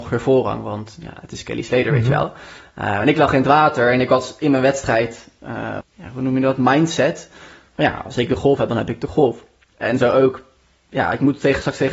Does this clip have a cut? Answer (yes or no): yes